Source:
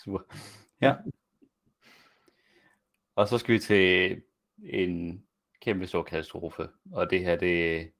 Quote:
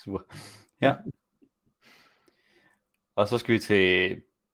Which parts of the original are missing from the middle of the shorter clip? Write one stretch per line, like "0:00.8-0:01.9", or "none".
none